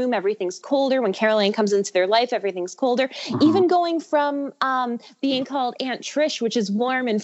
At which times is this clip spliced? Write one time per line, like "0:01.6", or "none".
none